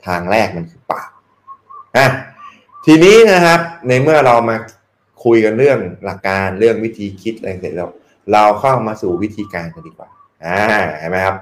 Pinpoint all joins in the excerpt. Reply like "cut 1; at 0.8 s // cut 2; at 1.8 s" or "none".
cut 1; at 6.2 s